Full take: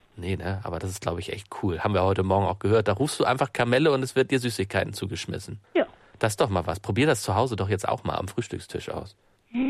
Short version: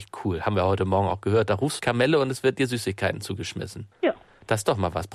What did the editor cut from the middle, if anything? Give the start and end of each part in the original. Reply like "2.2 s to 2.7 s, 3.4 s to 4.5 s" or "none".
3.2 s to 3.5 s